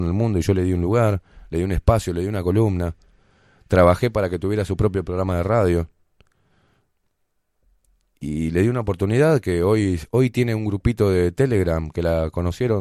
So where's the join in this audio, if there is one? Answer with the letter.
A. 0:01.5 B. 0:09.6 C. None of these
C